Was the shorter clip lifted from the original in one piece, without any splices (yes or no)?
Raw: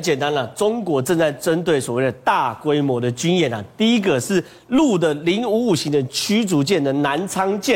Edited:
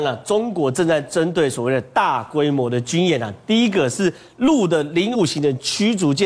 no